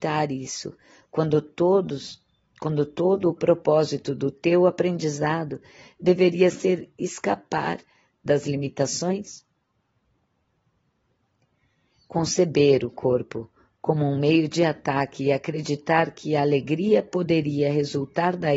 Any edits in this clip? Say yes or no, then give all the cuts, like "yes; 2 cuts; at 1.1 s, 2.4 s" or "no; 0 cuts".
no; 0 cuts